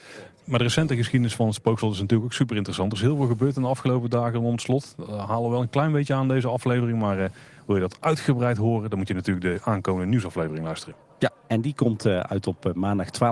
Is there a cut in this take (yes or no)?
no